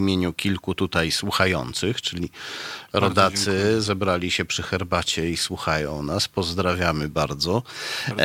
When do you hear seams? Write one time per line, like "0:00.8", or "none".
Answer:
none